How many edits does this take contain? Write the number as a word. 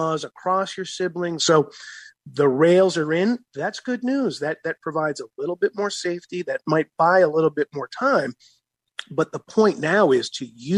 one